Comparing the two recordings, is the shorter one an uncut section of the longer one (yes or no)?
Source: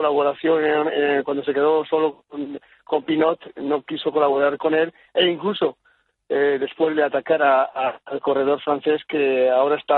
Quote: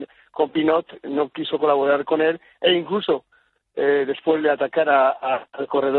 yes